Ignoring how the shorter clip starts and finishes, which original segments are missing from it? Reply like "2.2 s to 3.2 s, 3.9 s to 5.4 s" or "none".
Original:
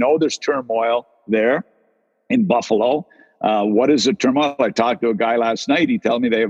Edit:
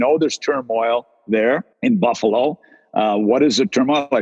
1.7 s to 2.2 s